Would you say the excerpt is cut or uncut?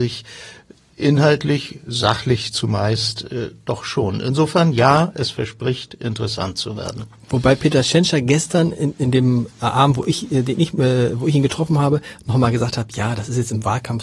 uncut